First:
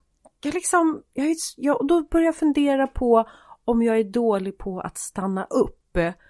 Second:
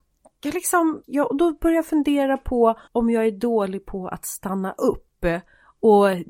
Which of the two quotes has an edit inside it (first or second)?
second